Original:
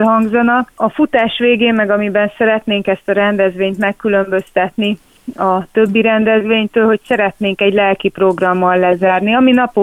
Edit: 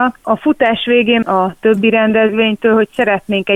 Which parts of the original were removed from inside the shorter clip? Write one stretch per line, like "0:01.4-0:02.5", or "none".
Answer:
0:01.8-0:05.3